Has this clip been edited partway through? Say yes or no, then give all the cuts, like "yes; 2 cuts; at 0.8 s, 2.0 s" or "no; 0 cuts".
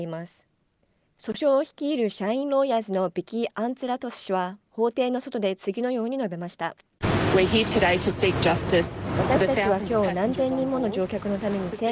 no; 0 cuts